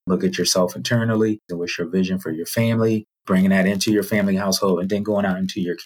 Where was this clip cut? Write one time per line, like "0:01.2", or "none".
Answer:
0:01.5